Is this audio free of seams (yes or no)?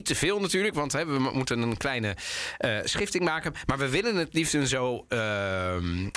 yes